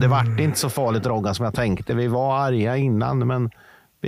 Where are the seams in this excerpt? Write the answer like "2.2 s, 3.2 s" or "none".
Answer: none